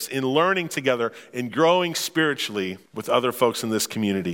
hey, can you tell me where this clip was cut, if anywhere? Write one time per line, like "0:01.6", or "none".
0:02.9

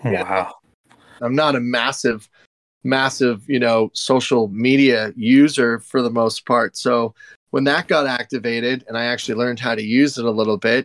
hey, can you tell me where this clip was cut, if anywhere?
0:01.2

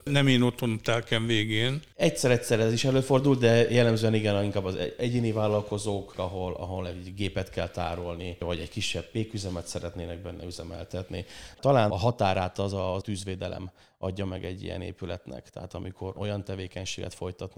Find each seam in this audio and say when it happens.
0:06.1
0:11.5

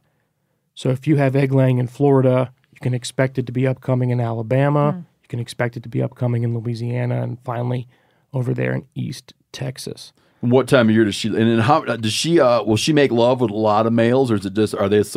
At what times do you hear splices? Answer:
none

